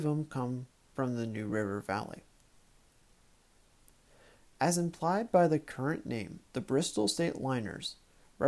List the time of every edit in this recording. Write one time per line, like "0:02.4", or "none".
0:06.4